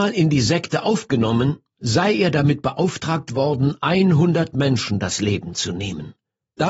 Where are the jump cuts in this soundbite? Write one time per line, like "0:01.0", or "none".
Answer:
none